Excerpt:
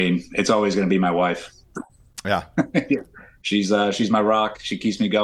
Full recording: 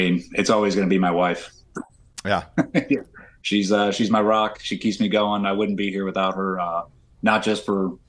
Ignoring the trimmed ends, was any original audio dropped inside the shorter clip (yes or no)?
no